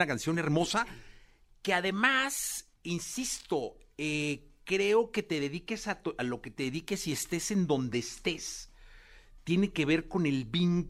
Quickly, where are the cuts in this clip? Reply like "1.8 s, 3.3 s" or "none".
2.7 s